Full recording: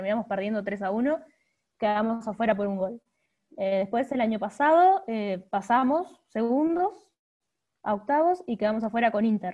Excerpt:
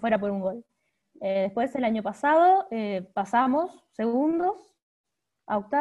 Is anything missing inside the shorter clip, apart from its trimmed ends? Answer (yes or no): no